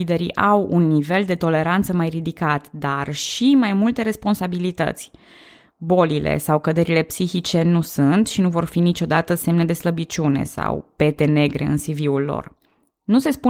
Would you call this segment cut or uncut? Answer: uncut